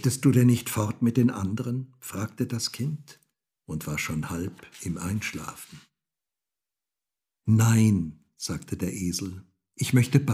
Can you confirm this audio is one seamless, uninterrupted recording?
yes; 0 cuts

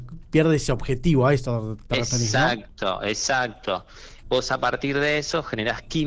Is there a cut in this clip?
yes; 1 cut; at 4.2 s

